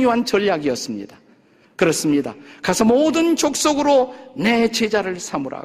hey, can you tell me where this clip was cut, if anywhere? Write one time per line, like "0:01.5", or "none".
0:01.6